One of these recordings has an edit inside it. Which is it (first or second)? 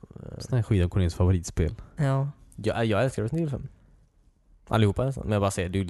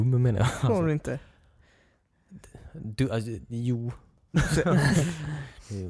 second